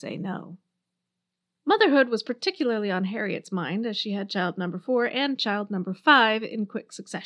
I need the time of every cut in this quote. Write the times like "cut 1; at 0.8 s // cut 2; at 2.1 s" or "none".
none

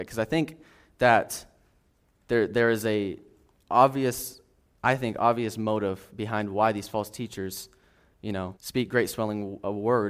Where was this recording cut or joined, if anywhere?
cut 1; at 8.6 s

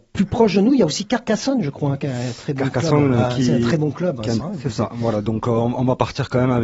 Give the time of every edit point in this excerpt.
cut 1; at 4.4 s

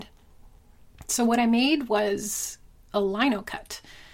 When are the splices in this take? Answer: none

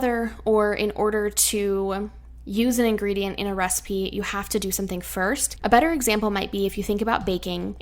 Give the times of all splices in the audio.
cut 1; at 5.6 s

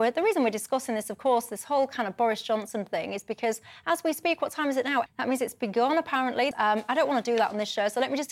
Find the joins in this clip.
cut 1; at 5.1 s // cut 2; at 6.5 s

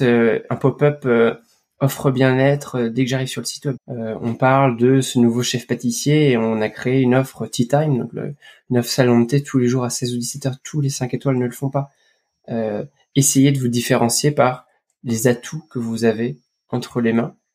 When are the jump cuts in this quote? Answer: cut 1; at 3.8 s

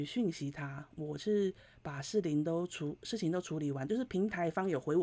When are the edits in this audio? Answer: none

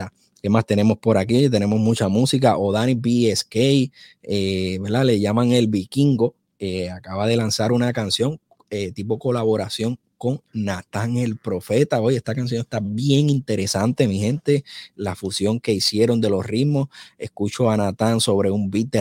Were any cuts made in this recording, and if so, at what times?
none

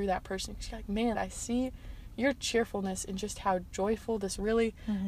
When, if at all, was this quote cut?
cut 1; at 1.1 s

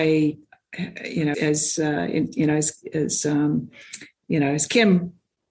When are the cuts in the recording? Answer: cut 1; at 1.3 s

